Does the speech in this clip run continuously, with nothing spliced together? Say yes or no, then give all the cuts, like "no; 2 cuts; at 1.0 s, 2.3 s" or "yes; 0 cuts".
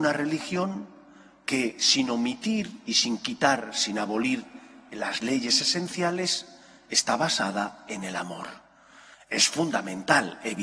no; 1 cut; at 9.1 s